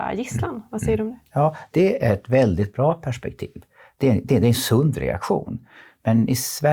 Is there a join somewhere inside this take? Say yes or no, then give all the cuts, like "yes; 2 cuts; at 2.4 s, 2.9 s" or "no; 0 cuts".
no; 0 cuts